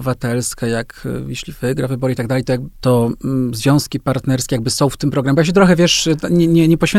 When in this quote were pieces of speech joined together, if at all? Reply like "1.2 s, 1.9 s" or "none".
2.7 s